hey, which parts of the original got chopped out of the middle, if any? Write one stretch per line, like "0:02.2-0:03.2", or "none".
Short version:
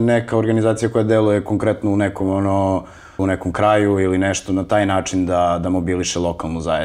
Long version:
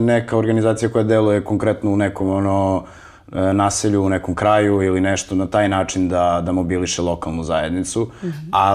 0:03.2-0:04.0